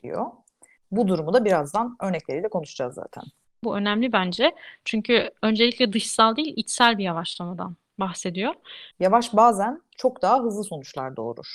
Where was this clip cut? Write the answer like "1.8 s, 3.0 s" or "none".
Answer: 3.6 s, 8.9 s